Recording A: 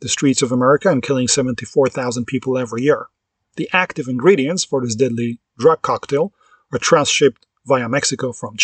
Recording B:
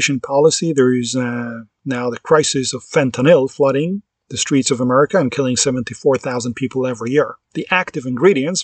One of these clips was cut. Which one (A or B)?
B